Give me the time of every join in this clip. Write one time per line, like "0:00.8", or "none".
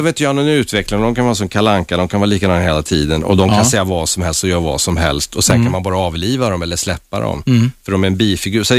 none